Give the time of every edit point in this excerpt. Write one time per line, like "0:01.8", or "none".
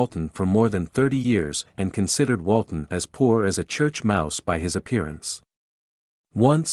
none